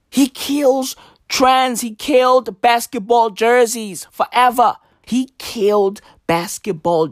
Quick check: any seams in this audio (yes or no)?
yes